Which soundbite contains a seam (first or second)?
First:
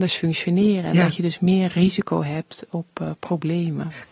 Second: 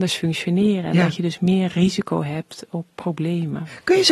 second